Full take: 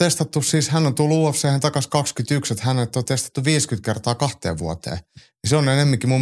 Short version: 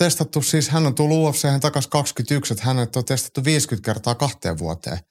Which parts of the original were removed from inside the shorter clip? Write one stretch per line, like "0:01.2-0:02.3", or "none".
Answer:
none